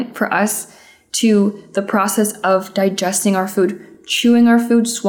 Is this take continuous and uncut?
yes; 0 cuts

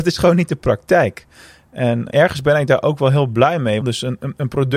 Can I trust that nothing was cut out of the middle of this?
no; 2 cuts; at 2.1 s, 3.8 s

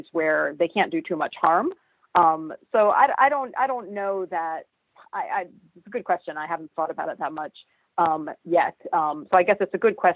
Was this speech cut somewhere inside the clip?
no; 0 cuts

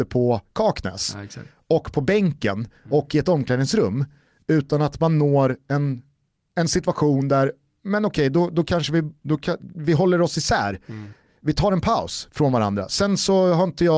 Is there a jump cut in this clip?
no; 0 cuts

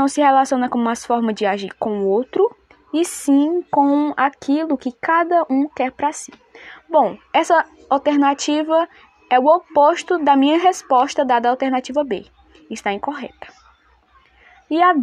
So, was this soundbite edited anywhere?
no; 0 cuts

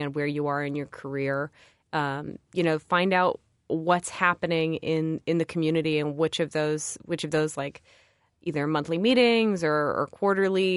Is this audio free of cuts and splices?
yes; 0 cuts

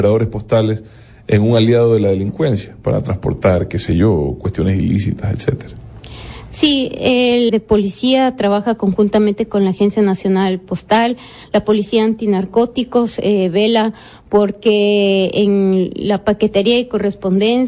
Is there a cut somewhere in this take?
yes; 1 cut; at 7.5 s

